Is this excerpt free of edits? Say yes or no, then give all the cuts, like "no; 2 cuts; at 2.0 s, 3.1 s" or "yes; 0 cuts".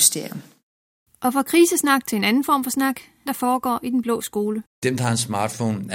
no; 2 cuts; at 3.3 s, 4.7 s